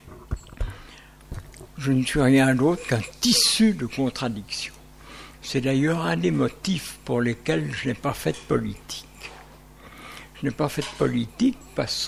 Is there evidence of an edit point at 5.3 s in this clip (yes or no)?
yes